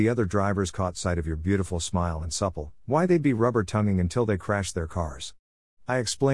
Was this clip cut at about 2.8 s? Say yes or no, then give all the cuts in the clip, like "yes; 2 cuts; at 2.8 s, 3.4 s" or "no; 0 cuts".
yes; 1 cut; at 2.8 s